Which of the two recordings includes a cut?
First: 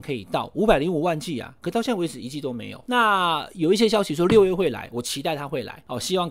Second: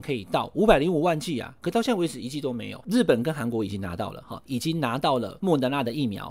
second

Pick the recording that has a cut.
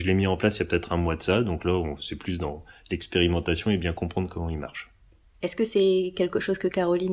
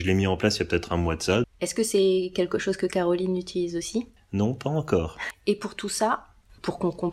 second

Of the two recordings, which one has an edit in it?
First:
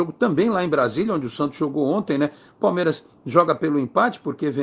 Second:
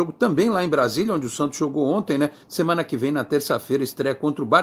second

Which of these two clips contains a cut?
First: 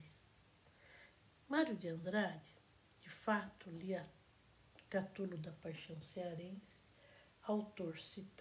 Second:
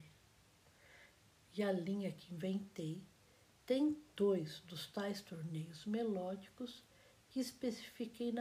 second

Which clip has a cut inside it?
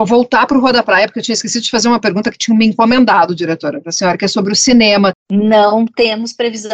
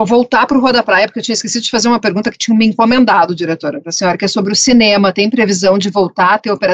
first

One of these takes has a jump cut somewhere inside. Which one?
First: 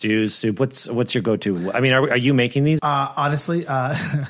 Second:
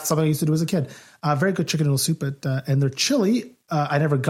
first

